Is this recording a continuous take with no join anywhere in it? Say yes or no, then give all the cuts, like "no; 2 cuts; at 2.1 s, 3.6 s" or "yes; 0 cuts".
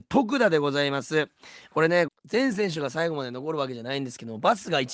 no; 1 cut; at 2.1 s